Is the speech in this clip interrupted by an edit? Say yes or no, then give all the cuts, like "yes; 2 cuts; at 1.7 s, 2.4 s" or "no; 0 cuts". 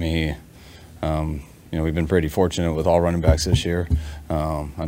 no; 0 cuts